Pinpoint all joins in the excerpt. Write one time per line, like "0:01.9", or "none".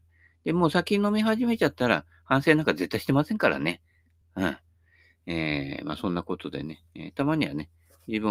none